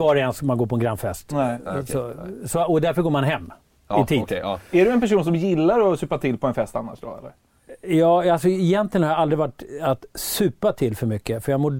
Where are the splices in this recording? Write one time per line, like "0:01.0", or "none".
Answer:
none